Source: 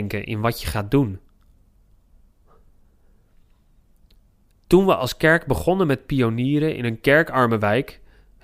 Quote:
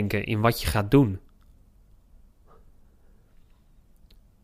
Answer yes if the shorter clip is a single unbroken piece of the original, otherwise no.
yes